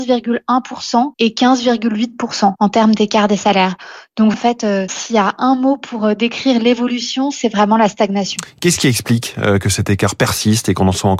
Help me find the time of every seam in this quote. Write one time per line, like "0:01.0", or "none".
0:04.3